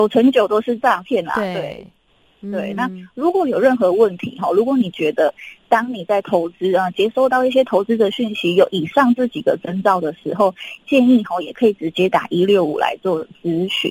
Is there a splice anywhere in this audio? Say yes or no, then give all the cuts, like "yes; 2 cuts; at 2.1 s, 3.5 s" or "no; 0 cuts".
no; 0 cuts